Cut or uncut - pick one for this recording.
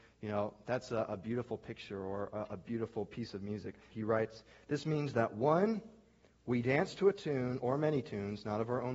cut